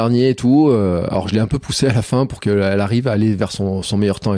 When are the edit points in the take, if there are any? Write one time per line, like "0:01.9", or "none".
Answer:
none